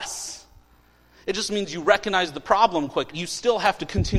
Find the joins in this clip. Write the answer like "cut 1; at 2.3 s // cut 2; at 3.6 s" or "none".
cut 1; at 3.1 s